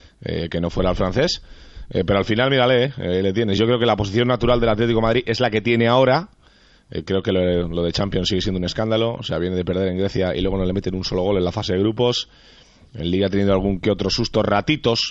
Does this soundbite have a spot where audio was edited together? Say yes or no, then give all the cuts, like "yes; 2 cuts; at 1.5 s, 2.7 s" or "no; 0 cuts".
no; 0 cuts